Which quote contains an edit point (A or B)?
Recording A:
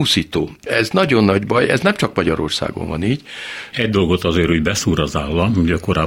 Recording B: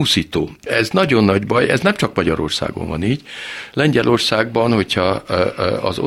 A